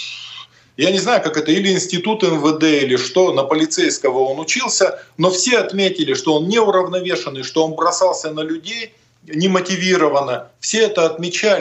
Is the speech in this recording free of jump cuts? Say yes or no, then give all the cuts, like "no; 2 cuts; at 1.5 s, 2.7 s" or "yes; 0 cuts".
yes; 0 cuts